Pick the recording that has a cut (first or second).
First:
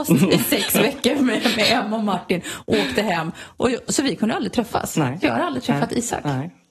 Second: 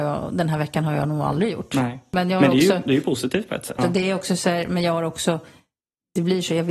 second